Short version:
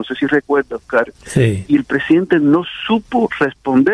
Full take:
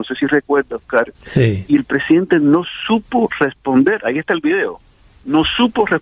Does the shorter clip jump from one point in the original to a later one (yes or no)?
no